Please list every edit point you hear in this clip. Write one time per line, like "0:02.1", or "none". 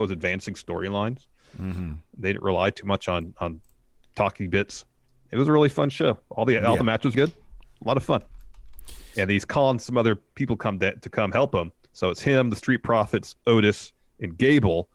0:07.1
0:09.1

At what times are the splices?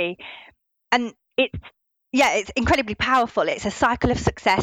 none

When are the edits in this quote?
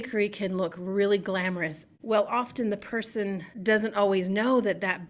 0:03.5

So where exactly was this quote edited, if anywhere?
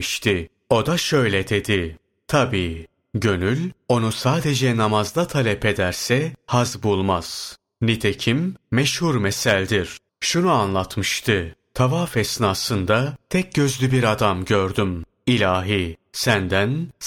0:10.1

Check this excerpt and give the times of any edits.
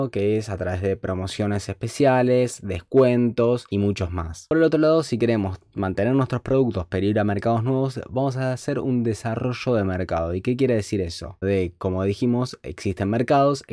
0:11.4

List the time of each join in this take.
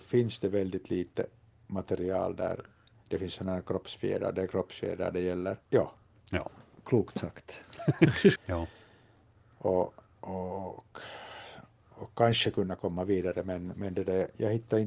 0:05.6
0:08.4

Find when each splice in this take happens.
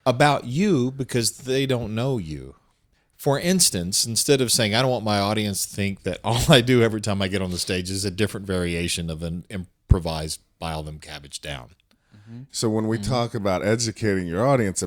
0:12.5

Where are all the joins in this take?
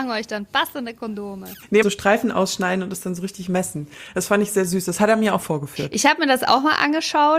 0:01.8

